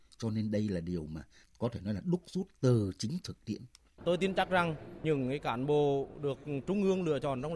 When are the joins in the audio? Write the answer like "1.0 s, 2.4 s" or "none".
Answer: 4.0 s